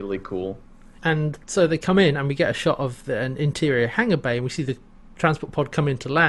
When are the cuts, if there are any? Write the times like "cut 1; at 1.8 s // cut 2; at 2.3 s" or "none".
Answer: cut 1; at 1.0 s